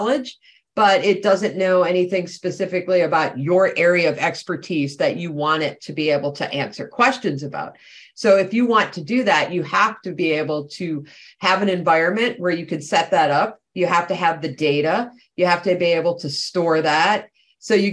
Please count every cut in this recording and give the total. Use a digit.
0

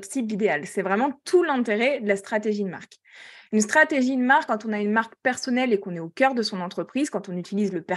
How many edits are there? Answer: 0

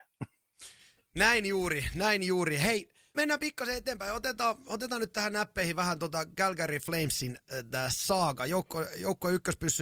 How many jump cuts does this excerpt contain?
1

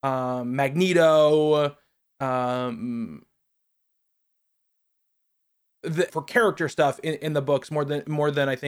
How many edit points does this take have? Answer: 1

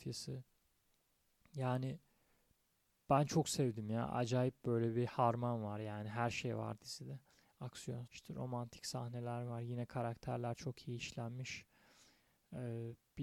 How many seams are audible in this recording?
1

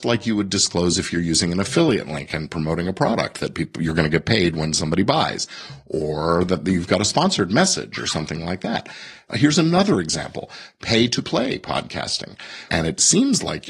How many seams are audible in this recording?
2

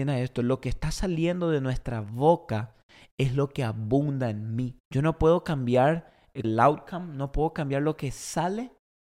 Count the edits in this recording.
2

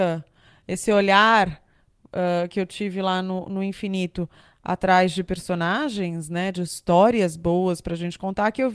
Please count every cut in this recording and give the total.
0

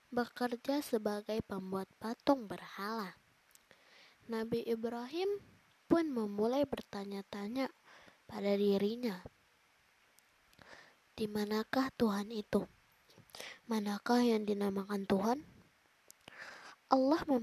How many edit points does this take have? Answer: 0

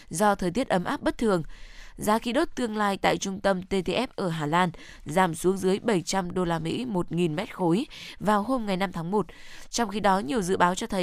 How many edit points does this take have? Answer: 0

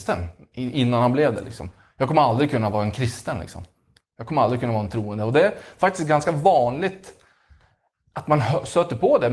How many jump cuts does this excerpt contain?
0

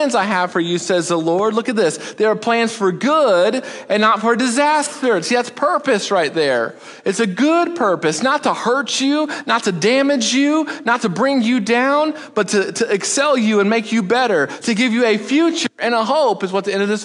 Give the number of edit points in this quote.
0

